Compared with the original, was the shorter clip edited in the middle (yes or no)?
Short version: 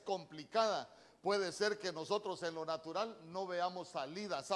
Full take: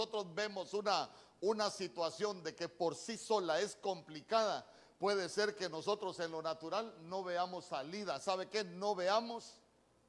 no